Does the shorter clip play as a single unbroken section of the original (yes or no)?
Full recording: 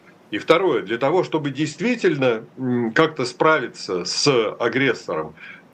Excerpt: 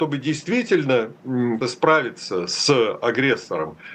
no